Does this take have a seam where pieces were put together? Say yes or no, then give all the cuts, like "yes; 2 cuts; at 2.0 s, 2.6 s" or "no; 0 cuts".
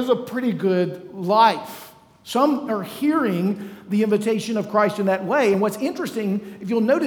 no; 0 cuts